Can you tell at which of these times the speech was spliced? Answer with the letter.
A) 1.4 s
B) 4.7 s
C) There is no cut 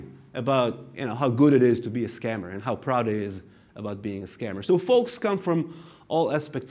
C